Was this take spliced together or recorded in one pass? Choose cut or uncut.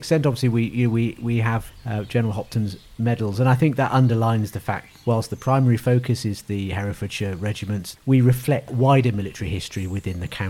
cut